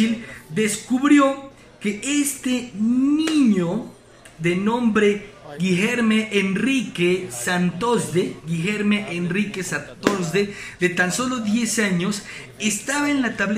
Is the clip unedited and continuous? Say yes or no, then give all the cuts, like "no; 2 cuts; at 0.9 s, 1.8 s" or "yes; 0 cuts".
yes; 0 cuts